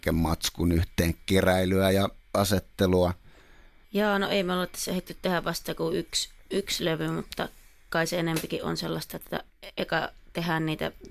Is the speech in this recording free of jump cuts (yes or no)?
yes